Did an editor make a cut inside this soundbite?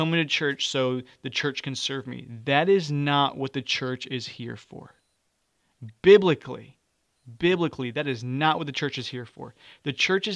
no; 0 cuts

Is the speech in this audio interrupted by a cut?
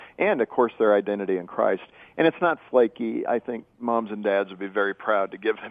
no; 0 cuts

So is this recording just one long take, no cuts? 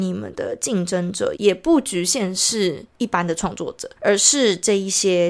no; 2 cuts; at 1.4 s, 4.0 s

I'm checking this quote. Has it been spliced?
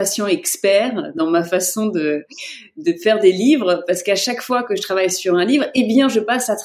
no; 0 cuts

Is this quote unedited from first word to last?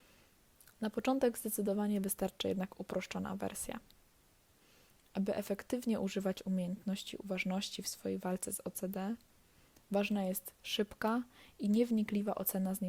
yes; 0 cuts

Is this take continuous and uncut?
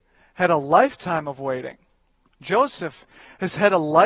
yes; 0 cuts

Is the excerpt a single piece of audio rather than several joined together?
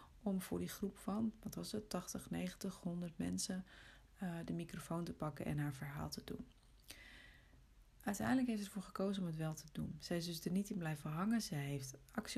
yes; 0 cuts

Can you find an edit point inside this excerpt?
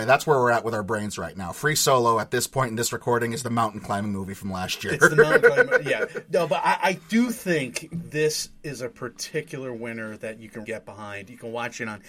yes; 1 cut; at 10.6 s

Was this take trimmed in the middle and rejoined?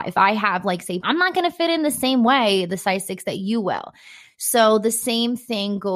yes; 1 cut; at 1.0 s

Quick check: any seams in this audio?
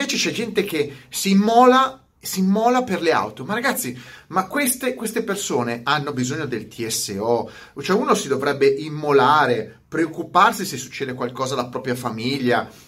no; 0 cuts

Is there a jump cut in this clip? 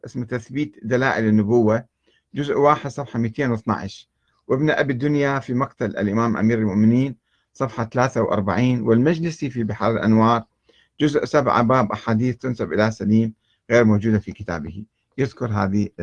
no; 0 cuts

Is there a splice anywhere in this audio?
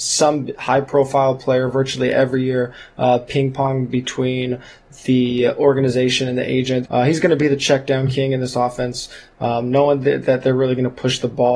yes; 1 cut; at 6.8 s

